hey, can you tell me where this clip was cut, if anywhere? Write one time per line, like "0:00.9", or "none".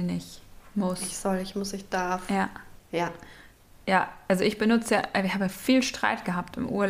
0:02.8